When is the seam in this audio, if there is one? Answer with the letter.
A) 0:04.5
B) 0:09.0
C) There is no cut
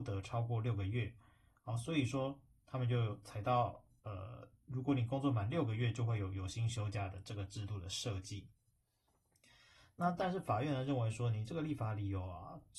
C